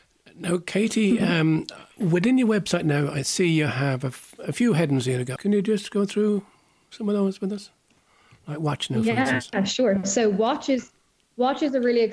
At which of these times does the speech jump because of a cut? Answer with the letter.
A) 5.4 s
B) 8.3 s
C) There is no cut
A